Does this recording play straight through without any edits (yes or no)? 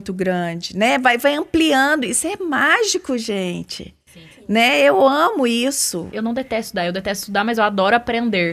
no